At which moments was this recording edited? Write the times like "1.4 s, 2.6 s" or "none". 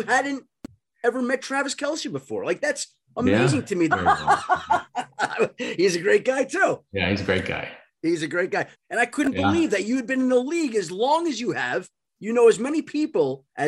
3.9 s, 8.7 s